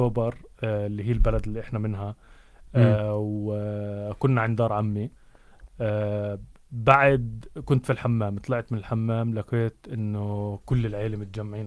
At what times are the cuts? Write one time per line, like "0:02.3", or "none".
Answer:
none